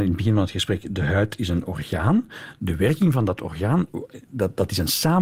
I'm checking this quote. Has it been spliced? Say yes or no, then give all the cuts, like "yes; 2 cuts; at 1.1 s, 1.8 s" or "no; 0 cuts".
no; 0 cuts